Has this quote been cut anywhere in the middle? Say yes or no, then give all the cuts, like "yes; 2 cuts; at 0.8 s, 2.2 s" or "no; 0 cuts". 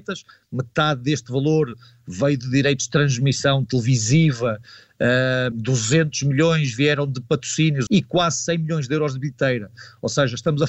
yes; 2 cuts; at 5.5 s, 7.9 s